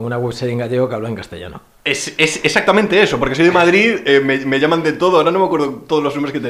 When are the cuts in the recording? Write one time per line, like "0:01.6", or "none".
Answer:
none